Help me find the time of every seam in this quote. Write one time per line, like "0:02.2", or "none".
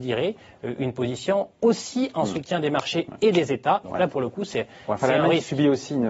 0:03.8